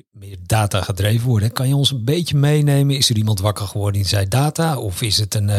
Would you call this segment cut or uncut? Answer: uncut